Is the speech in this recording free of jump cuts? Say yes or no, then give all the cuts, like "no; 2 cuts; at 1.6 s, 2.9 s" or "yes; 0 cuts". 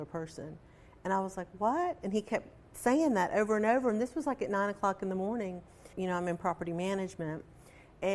no; 1 cut; at 5.9 s